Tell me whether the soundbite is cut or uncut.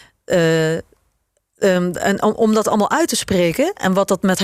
uncut